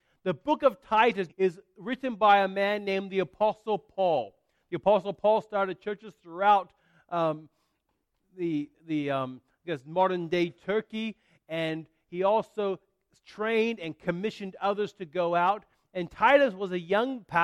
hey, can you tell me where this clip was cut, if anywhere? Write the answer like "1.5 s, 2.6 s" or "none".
1.3 s